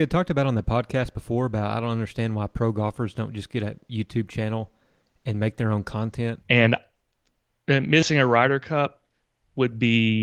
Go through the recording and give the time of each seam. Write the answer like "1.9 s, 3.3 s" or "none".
6.4 s